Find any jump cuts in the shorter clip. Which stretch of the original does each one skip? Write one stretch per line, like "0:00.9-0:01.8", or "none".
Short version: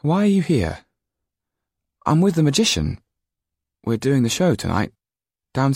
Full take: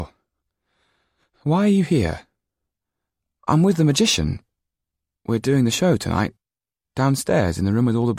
none